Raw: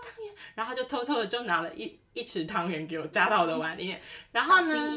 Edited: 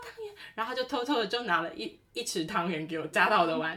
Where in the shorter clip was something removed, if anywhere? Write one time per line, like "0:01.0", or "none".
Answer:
none

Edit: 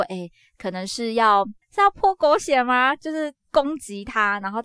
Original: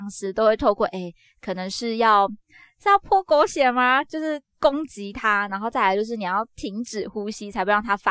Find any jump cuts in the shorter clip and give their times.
0:01.6

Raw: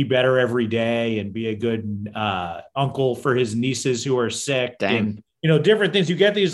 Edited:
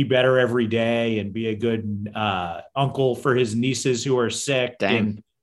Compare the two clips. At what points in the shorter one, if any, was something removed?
none

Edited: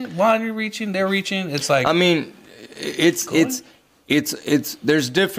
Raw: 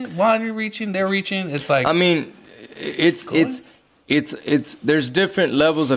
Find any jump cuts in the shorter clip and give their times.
none

